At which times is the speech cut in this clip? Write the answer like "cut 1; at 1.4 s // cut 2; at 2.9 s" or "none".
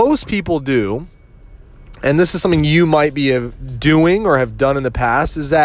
none